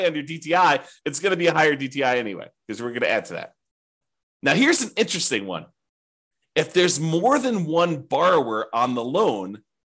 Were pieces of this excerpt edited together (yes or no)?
no